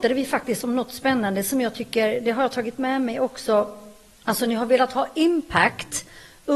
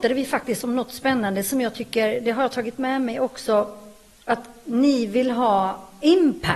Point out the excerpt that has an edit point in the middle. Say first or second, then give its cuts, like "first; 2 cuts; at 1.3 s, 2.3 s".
first; 1 cut; at 4.2 s